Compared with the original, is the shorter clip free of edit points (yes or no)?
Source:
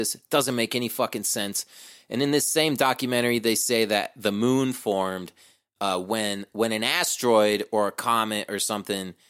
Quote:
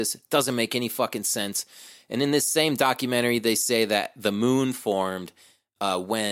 yes